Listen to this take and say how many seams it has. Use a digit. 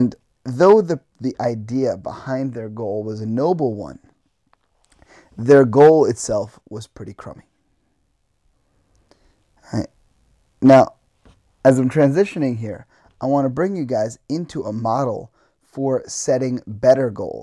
0